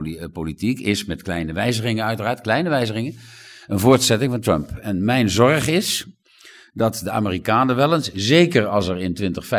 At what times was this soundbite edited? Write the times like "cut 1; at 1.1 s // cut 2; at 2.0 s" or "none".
none